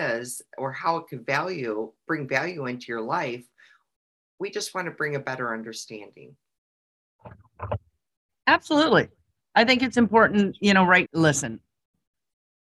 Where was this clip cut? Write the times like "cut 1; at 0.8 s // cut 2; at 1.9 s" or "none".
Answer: cut 1; at 11.1 s